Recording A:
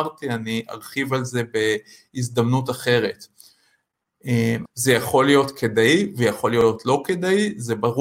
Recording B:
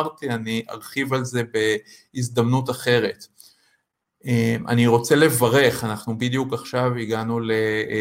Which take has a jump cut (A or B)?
A